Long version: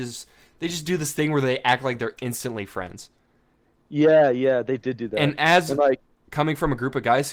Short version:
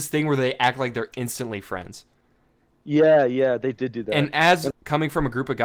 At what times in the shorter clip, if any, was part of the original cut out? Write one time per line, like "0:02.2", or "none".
0:04.7